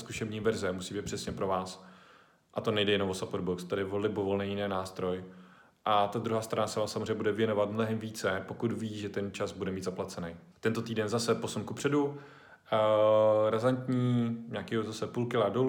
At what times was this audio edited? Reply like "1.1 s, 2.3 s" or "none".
10.5 s

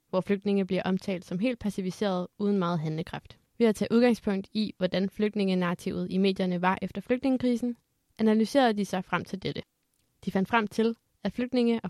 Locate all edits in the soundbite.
3.5 s

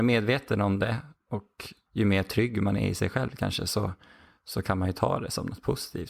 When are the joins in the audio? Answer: 1.9 s

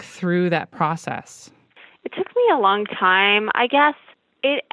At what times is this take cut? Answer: none

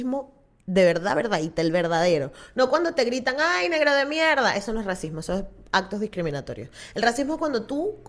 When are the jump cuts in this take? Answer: none

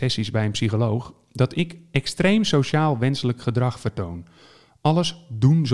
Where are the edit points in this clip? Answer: none

